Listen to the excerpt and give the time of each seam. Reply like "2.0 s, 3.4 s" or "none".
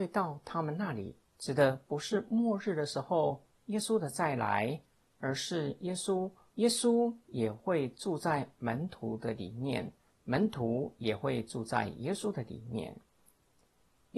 1.3 s, 6.5 s